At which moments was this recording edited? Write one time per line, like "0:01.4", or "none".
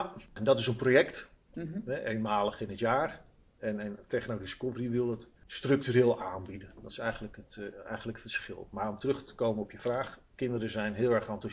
none